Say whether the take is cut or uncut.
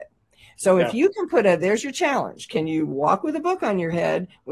uncut